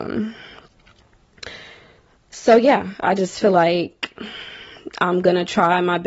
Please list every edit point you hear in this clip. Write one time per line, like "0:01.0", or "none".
0:03.0